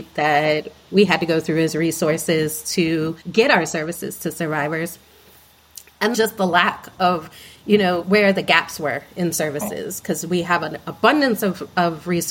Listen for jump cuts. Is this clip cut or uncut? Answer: cut